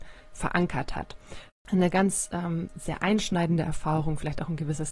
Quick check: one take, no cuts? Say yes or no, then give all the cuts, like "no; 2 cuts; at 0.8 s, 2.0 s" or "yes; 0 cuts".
no; 1 cut; at 1.5 s